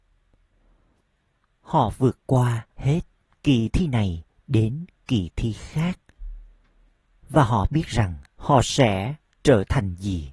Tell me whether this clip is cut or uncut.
cut